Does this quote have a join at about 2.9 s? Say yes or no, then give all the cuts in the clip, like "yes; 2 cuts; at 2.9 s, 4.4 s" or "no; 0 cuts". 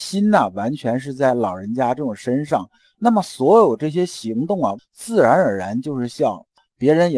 no; 1 cut; at 4.8 s